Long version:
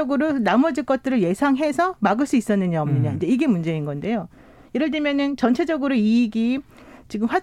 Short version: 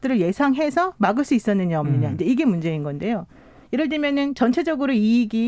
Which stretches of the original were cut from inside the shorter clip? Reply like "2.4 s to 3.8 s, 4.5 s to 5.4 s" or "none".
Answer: none